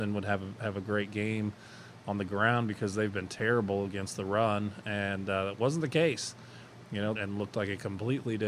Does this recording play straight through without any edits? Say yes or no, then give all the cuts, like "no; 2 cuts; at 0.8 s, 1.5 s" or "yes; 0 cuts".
no; 1 cut; at 7.2 s